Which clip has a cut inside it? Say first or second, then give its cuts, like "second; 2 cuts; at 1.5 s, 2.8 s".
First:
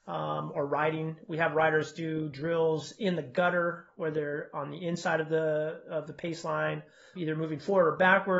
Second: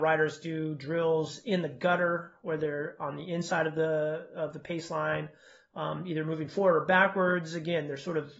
first; 1 cut; at 7.2 s